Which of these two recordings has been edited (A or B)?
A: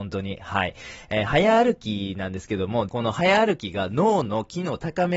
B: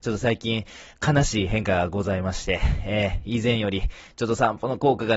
A